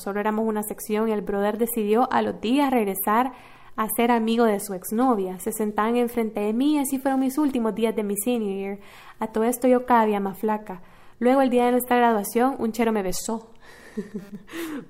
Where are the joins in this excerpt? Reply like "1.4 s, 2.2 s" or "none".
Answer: none